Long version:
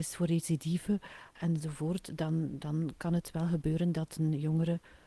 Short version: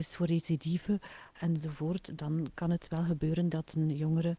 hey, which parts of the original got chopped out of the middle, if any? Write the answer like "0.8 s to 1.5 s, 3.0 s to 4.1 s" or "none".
2.2 s to 2.6 s